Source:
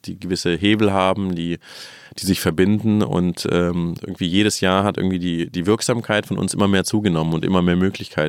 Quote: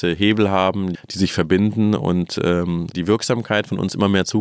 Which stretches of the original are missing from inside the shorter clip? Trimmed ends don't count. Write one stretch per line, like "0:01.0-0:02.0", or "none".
0:01.4-0:02.0
0:04.0-0:05.5

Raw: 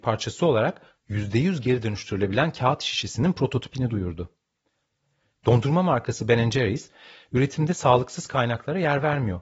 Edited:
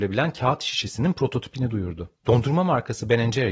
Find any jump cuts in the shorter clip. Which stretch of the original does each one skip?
0:04.4-0:05.4

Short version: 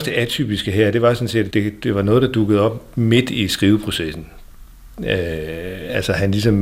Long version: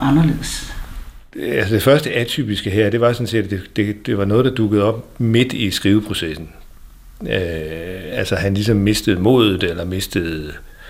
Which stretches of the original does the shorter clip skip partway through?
0:03.5-0:03.7

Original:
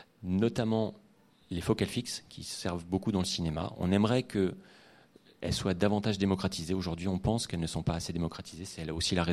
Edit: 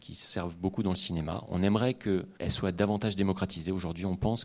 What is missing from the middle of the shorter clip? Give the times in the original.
0:04.7-0:05.4

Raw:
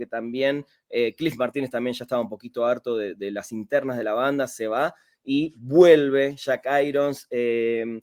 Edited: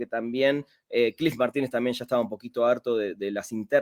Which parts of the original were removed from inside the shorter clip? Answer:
none

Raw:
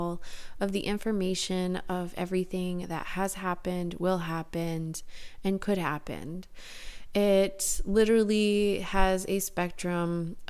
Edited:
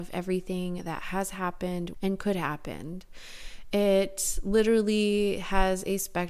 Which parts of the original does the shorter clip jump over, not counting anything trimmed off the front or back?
0:04.0-0:05.4

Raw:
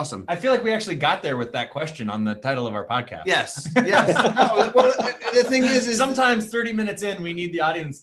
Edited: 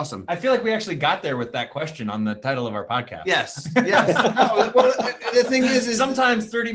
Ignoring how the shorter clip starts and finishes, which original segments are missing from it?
none

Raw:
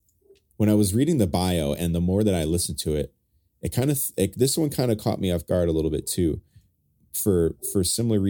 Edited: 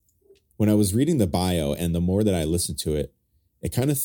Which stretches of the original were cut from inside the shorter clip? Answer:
none

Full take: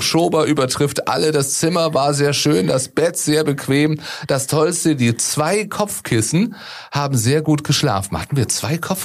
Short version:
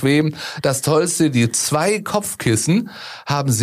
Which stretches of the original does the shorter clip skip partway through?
none

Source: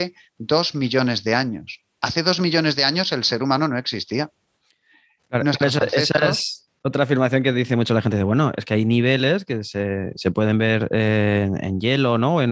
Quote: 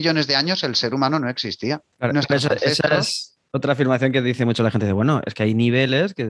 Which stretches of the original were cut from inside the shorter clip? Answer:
0:04.4-0:05.2

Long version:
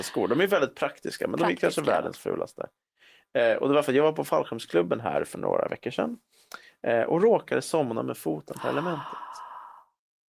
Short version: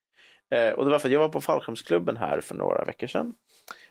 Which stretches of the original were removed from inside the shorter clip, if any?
none

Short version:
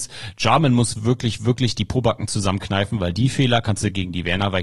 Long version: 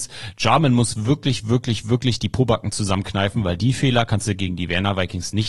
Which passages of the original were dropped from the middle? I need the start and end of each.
0:01.0-0:01.4

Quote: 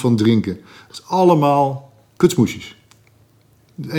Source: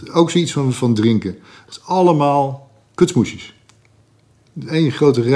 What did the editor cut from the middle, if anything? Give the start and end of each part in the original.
none

